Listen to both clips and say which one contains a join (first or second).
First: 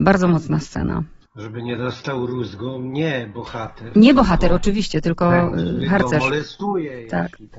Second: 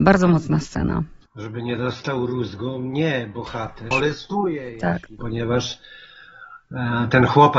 second